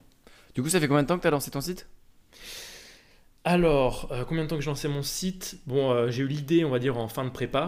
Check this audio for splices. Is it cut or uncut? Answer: uncut